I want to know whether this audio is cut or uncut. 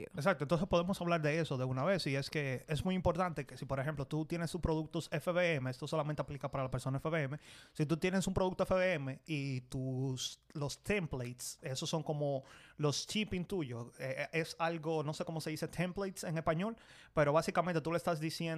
uncut